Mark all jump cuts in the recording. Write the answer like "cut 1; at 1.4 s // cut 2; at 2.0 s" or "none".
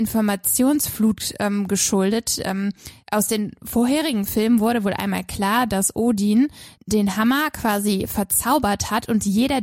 cut 1; at 3.0 s // cut 2; at 6.7 s